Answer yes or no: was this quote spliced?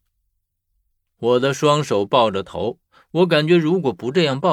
no